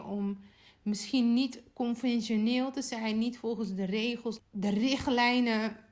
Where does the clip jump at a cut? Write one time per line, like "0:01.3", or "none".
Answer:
0:04.4